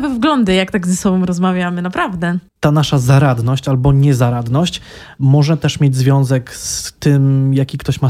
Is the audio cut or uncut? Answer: uncut